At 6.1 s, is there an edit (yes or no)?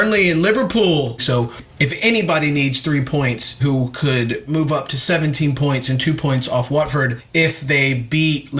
no